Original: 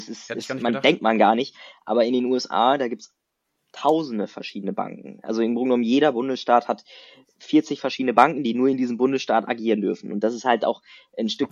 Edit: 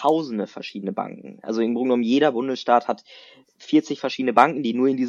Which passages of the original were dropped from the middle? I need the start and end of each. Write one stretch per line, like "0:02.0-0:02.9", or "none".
none

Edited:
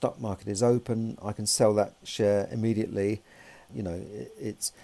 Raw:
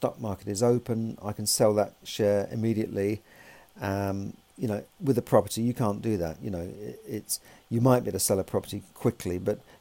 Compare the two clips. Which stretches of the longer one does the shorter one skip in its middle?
0:03.7-0:06.4

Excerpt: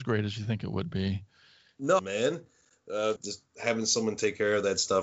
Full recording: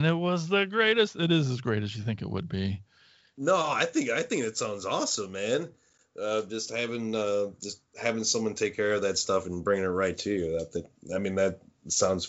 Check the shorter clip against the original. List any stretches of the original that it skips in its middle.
0:03.6-0:05.3
0:06.4-0:07.5

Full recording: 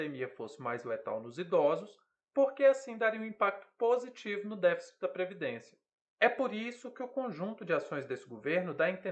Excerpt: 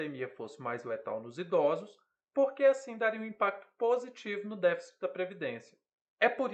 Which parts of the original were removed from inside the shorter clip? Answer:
none

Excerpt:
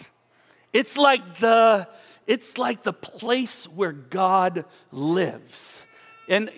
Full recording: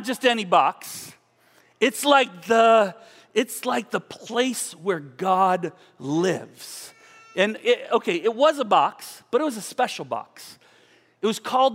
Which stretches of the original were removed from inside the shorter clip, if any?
none

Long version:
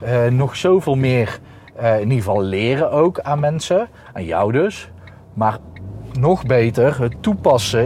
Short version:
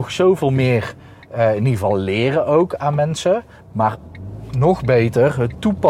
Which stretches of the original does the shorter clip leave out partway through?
0:04.0-0:05.2

